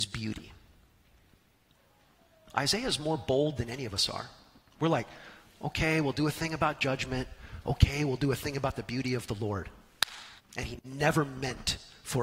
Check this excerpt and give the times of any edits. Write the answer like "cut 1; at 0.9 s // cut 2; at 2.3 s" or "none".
cut 1; at 10.4 s